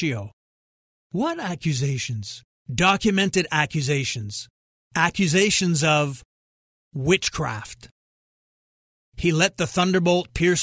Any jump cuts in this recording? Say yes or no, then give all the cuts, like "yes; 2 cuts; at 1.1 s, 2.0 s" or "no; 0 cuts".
yes; 1 cut; at 2.5 s